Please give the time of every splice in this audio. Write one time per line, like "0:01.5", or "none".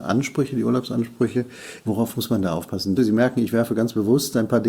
0:01.8
0:03.0